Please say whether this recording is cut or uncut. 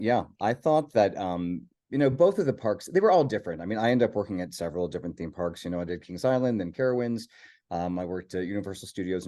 uncut